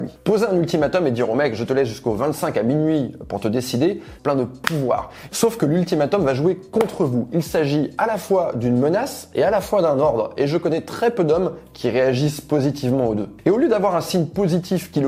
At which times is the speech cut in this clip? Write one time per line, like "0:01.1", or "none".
0:04.2
0:05.3